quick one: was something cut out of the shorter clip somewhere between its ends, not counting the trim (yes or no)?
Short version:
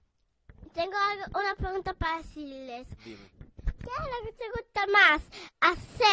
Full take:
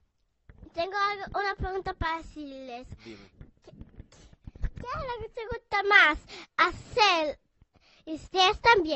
yes